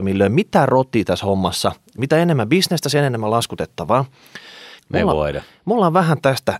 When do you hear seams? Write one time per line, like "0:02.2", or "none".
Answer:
0:02.0
0:04.8

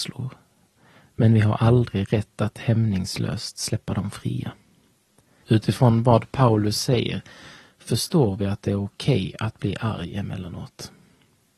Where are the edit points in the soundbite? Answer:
0:05.4

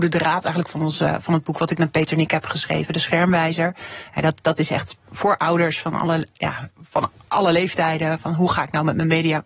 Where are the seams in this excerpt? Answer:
0:06.7

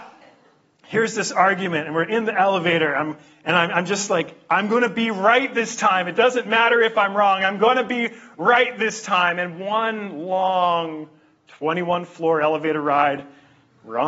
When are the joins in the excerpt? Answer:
none

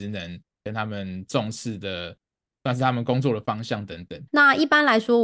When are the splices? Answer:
0:04.3

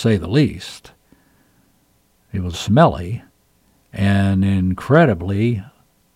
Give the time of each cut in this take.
0:02.5

